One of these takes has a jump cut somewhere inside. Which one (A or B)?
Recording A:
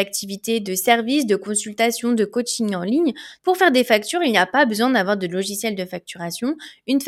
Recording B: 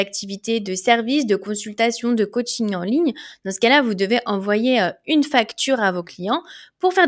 A